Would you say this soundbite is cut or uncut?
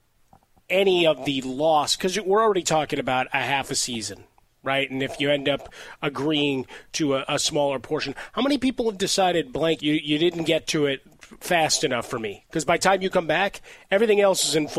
cut